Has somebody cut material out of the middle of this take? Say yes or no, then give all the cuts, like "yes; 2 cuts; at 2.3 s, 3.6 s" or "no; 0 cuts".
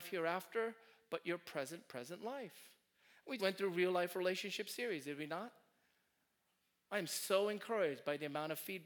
yes; 1 cut; at 3.4 s